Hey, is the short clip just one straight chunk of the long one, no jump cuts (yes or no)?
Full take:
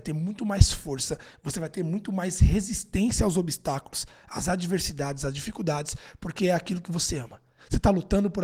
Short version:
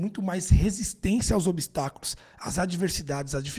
yes